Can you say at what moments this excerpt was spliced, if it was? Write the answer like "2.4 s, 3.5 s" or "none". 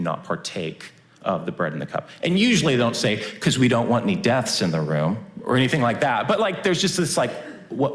none